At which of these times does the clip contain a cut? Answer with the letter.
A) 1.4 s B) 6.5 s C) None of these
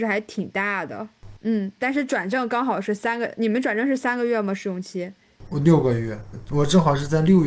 A